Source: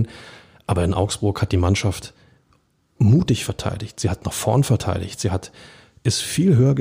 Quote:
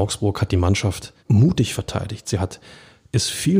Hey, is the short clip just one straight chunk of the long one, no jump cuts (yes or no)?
no